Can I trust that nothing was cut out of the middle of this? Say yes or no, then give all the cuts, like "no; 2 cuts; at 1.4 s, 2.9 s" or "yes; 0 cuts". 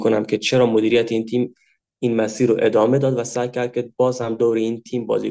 yes; 0 cuts